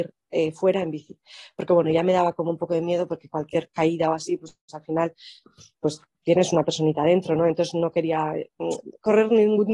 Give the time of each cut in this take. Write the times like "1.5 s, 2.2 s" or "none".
none